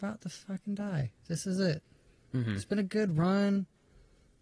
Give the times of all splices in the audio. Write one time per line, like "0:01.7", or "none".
none

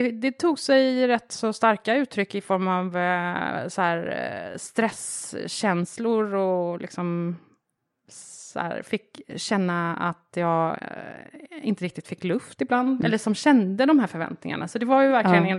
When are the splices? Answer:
0:13.0

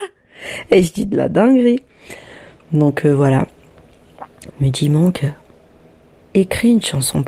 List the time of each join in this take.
0:04.5

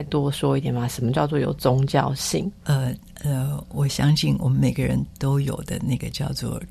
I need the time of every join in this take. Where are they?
0:02.6

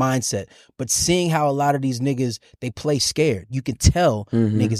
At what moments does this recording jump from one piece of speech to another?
none

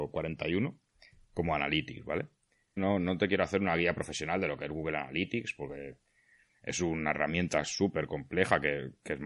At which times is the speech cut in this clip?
0:02.8

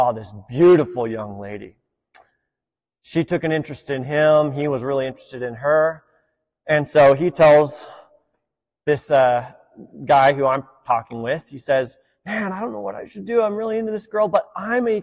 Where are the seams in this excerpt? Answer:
none

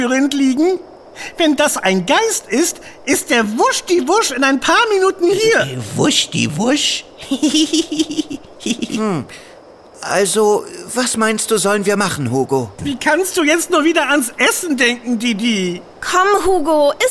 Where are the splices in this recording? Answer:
0:12.8

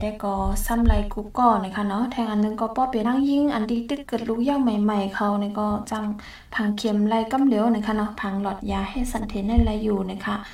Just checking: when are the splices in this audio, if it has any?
0:03.0

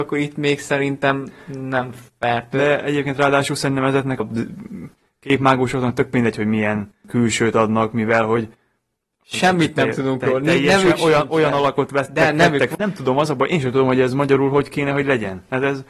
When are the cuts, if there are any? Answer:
0:04.2
0:12.7

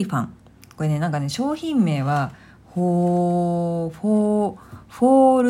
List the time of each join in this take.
none

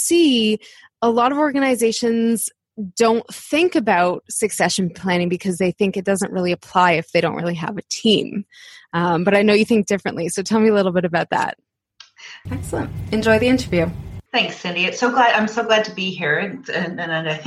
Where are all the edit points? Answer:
0:12.5
0:14.3

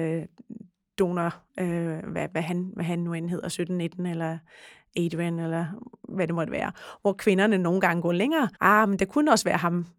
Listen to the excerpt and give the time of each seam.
0:08.5

